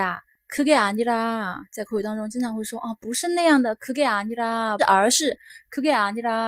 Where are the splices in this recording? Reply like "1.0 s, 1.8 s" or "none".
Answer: 4.8 s